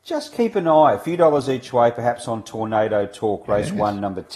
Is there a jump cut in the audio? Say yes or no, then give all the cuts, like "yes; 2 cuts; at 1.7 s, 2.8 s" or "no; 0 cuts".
no; 0 cuts